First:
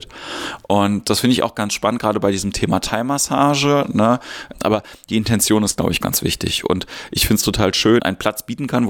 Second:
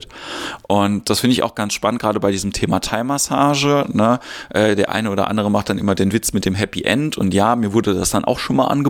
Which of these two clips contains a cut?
first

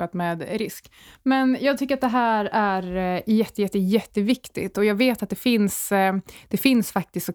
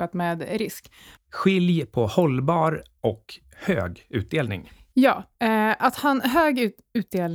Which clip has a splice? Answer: second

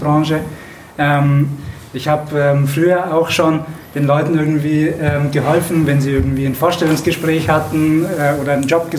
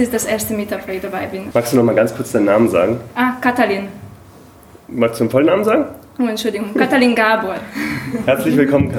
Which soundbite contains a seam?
second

